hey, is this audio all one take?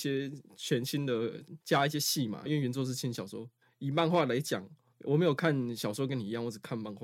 no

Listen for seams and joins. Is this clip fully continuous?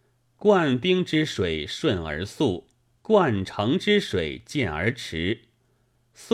yes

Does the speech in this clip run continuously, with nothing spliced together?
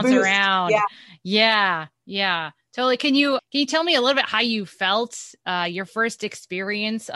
no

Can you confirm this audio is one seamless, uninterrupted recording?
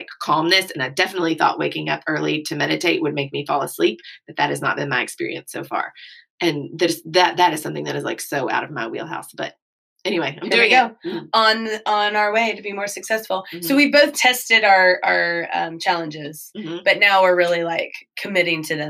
yes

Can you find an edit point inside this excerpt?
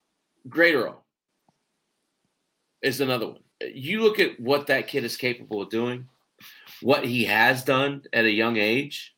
yes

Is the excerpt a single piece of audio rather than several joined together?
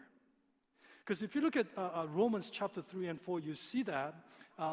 yes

